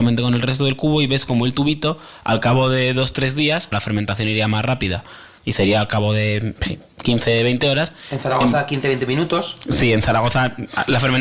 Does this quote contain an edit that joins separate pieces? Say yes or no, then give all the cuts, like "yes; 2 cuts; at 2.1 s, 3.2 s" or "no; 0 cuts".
yes; 1 cut; at 3.7 s